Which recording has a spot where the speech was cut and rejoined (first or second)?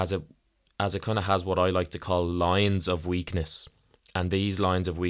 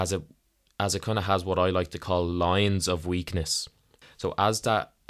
second